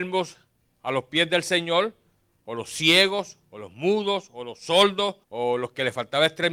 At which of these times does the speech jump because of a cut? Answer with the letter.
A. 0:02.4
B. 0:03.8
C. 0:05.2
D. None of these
C